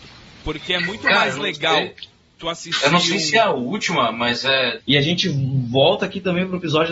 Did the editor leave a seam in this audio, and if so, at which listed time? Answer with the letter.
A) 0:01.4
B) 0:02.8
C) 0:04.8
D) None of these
C